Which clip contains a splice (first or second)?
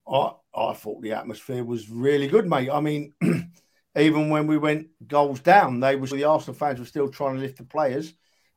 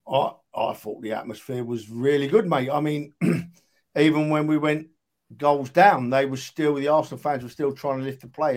first